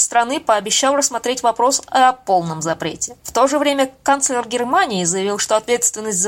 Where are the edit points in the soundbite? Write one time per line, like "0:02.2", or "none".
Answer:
0:03.2